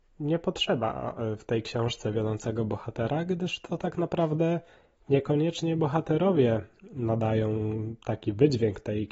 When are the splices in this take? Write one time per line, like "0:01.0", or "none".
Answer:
none